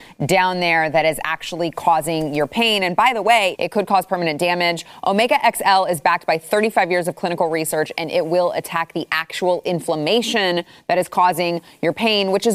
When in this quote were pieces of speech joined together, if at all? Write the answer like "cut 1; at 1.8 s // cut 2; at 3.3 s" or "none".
cut 1; at 3.5 s

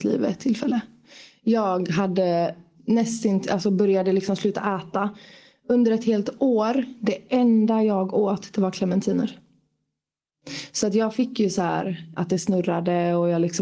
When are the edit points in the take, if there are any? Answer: cut 1; at 2.8 s // cut 2; at 12.2 s

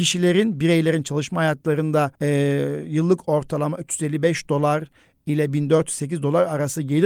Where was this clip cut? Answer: cut 1; at 2.2 s

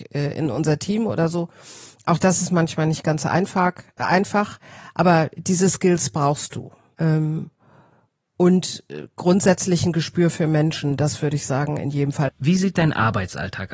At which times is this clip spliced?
cut 1; at 6.9 s // cut 2; at 12.3 s

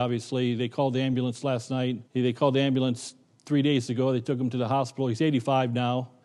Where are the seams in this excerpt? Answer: cut 1; at 2.0 s

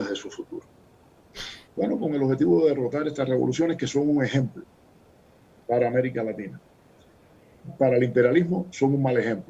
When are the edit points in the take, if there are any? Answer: cut 1; at 1.7 s

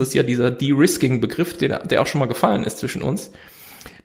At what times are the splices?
none

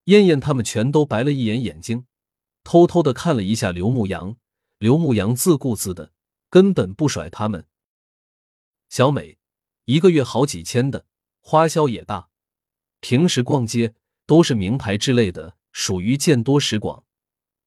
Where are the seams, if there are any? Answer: cut 1; at 9.7 s

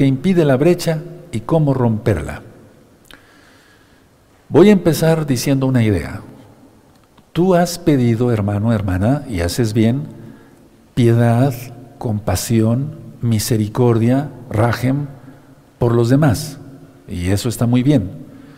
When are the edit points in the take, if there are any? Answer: none

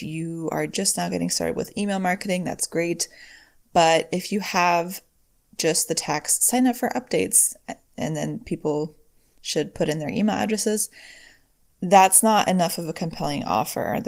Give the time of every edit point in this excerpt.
none

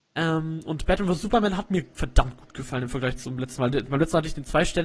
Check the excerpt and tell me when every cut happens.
none

